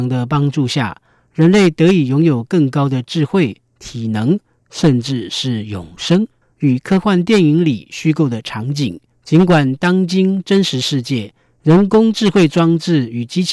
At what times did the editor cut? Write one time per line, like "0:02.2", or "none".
0:06.4